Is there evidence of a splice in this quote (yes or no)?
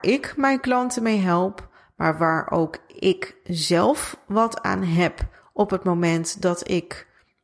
no